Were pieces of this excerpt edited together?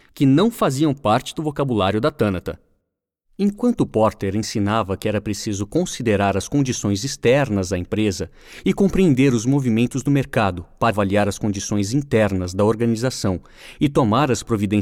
yes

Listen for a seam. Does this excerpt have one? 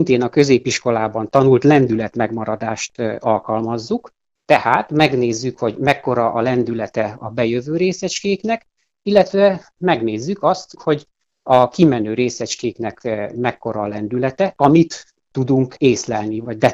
yes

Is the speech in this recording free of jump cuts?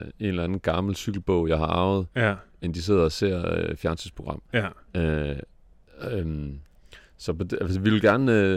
yes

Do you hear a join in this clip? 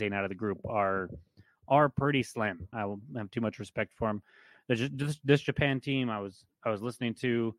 yes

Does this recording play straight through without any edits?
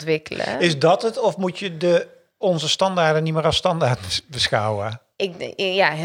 yes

